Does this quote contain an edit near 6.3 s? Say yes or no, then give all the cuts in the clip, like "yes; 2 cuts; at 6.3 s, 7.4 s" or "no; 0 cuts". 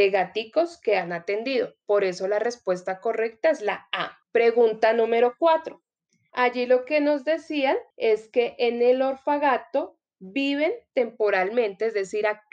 yes; 3 cuts; at 4.2 s, 6.3 s, 7.9 s